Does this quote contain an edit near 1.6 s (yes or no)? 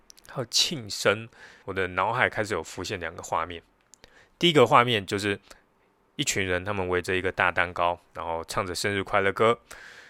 yes